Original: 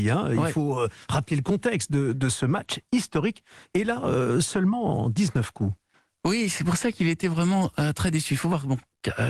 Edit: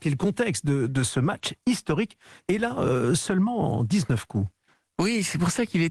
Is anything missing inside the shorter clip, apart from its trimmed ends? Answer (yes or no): no